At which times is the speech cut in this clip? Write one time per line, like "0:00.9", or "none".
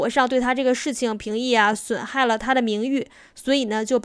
none